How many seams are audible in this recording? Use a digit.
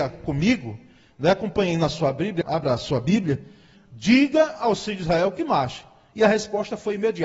2